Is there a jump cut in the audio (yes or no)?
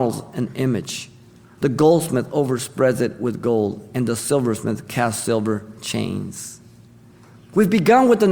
no